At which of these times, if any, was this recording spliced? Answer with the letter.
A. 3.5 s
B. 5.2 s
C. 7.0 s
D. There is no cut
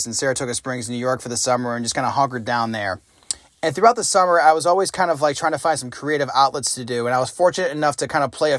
D